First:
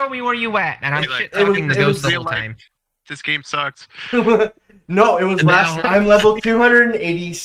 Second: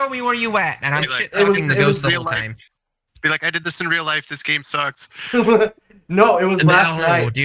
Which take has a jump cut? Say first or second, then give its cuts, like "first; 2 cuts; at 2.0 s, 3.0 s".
first; 2 cuts; at 3.1 s, 5.8 s